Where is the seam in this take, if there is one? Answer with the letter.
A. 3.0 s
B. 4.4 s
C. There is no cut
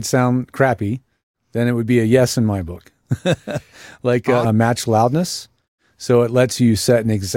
B